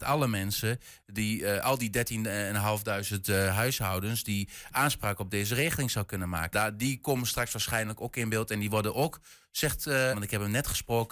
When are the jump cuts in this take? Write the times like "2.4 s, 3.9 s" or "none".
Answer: 6.5 s, 10.1 s